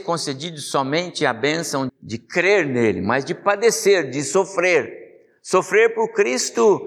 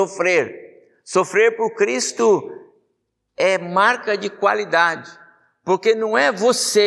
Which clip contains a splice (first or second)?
first